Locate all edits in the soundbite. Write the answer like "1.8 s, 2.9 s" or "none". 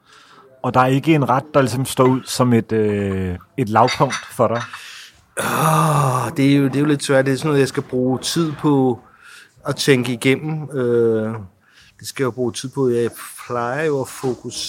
none